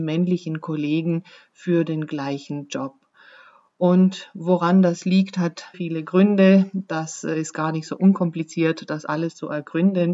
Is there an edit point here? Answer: yes; 1 cut; at 5.7 s

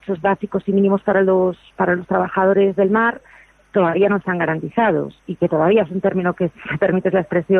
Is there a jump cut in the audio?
no; 0 cuts

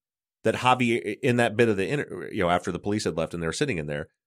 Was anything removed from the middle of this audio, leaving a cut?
no; 0 cuts

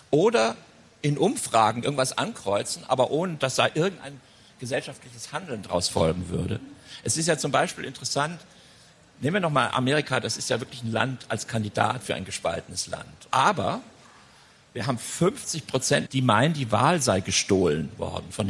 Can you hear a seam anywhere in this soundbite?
yes; 2 cuts; at 13.3 s, 16.1 s

